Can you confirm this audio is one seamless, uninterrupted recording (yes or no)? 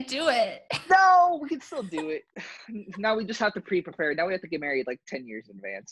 yes